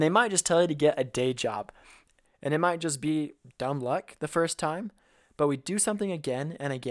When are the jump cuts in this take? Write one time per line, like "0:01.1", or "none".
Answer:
0:02.2